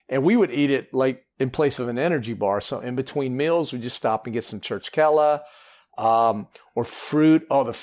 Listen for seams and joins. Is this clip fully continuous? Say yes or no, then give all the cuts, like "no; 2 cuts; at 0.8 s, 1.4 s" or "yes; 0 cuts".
yes; 0 cuts